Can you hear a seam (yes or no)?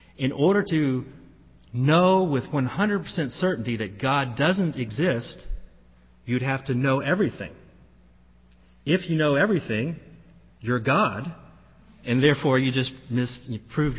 no